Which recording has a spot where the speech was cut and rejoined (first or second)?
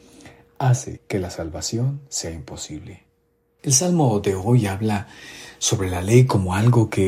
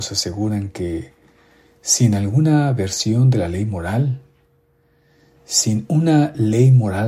first